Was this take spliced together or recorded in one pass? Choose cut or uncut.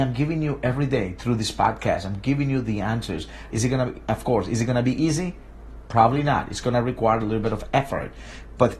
cut